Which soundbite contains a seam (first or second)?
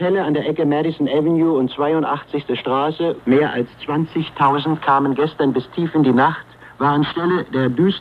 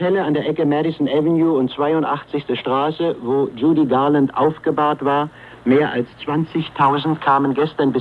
first